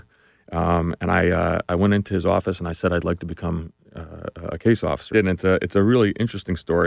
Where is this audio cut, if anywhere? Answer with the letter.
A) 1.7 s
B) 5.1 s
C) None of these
B